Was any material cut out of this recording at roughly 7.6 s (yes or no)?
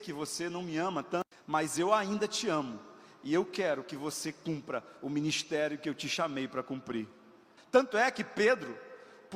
yes